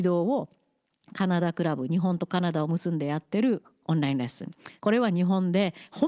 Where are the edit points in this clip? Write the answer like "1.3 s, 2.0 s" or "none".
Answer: 4.8 s